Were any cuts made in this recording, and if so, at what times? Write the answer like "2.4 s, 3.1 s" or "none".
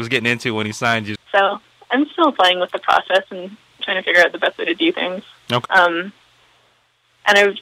1.2 s, 5.7 s